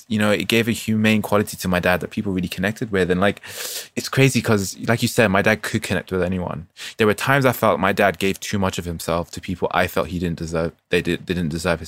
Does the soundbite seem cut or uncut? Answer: uncut